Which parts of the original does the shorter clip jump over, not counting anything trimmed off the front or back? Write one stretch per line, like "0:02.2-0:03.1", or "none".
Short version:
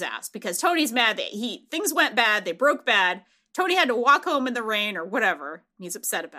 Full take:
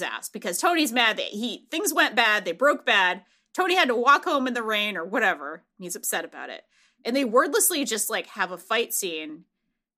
none